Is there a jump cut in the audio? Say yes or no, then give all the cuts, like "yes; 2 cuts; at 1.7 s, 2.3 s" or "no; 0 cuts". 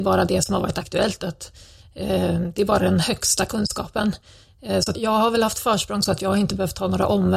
yes; 1 cut; at 4.9 s